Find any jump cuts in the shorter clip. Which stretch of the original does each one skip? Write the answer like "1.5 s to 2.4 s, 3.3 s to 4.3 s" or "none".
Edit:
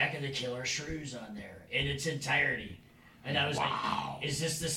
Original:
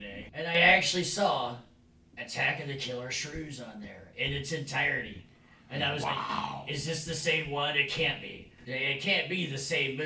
none